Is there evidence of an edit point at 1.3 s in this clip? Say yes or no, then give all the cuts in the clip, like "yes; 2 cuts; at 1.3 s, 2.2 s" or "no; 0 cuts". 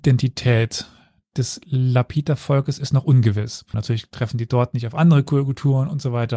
no; 1 cut; at 3.7 s